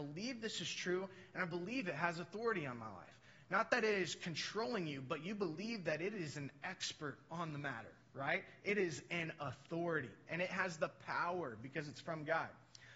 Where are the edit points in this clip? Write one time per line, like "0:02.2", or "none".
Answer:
none